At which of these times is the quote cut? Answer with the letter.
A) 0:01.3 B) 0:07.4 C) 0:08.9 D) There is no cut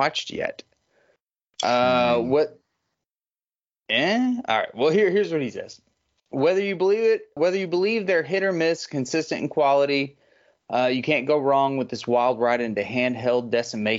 B